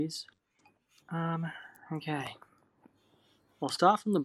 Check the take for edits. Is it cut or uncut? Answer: cut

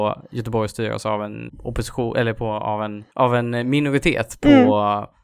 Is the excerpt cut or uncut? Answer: cut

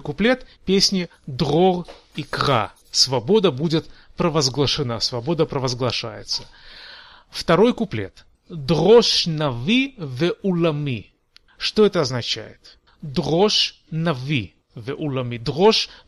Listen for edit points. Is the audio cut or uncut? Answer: uncut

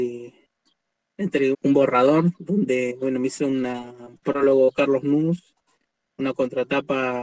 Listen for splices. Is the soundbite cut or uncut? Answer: cut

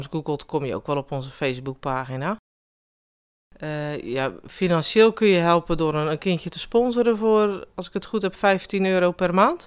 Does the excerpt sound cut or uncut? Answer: uncut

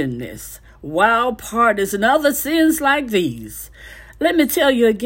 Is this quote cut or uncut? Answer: uncut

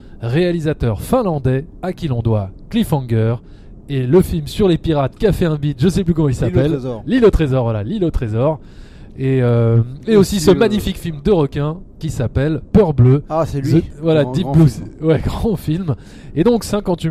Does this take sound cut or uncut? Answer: uncut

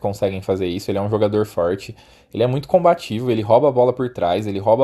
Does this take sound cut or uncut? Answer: uncut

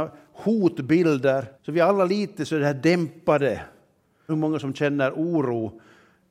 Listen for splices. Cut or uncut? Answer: cut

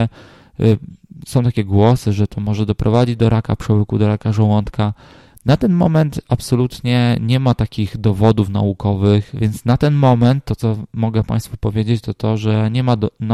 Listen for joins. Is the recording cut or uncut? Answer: cut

